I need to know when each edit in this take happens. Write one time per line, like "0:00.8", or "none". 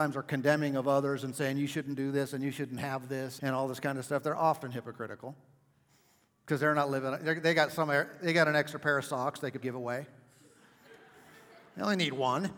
0:03.4
0:09.6